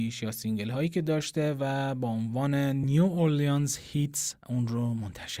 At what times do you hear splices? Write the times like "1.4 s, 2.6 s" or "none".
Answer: 4.4 s